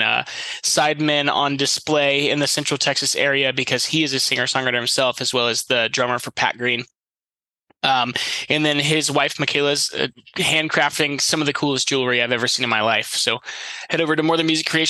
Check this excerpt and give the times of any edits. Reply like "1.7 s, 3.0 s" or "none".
none